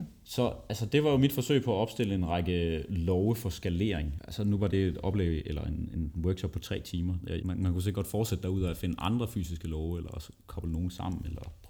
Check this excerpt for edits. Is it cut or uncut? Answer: uncut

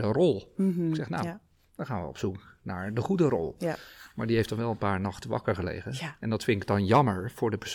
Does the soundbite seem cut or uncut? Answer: uncut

